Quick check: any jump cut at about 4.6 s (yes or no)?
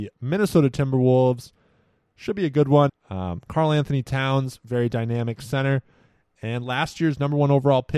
no